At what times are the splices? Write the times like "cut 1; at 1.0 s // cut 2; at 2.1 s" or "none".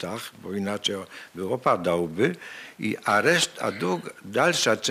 none